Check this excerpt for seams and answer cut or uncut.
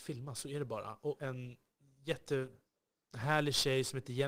cut